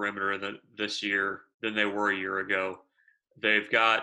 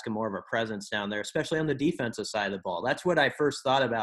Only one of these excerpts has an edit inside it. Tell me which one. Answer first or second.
first